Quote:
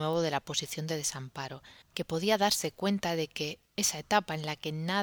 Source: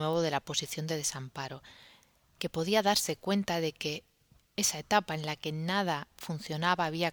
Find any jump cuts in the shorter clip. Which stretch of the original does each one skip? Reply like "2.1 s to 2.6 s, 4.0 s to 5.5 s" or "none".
1.8 s to 2.3 s, 4.1 s to 4.5 s